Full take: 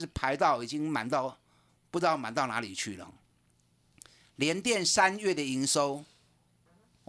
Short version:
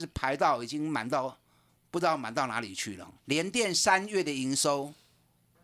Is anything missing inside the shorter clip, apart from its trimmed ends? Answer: yes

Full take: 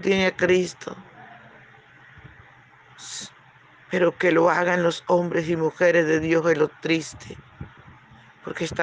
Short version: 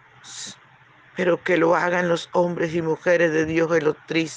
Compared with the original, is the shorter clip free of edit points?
yes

